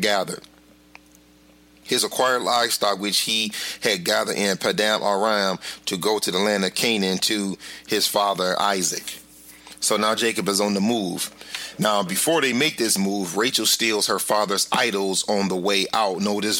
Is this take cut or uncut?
uncut